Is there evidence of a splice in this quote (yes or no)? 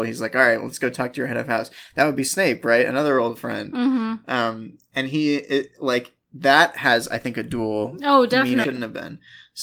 yes